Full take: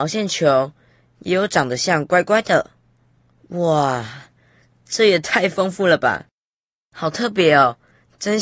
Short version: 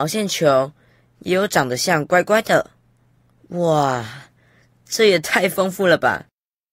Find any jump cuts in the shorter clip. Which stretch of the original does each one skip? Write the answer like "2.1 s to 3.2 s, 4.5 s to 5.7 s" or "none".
none